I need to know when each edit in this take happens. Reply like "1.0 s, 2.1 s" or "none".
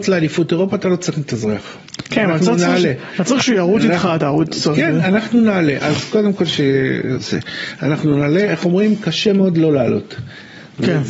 none